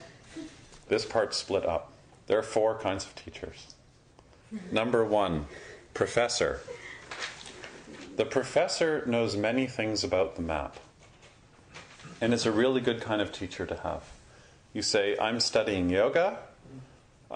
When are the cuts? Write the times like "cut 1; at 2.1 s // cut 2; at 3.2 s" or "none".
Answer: none